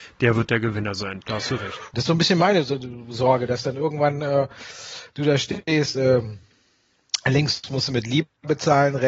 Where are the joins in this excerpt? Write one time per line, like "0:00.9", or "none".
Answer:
0:01.9